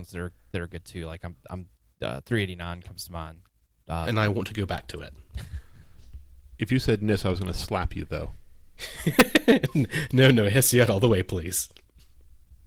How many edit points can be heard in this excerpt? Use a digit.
1